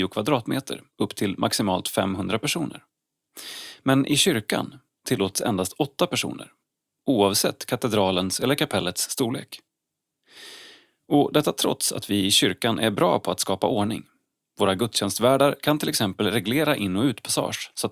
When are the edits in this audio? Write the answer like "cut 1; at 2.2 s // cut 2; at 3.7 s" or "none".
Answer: none